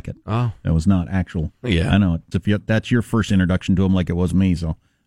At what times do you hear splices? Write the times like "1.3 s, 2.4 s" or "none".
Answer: 2.3 s